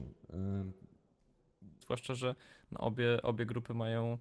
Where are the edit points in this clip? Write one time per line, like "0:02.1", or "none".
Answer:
0:01.8